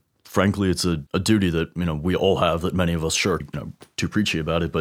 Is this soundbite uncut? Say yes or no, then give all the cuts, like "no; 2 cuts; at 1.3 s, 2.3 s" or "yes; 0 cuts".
no; 2 cuts; at 1.1 s, 3.4 s